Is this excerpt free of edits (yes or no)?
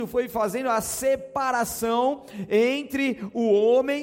yes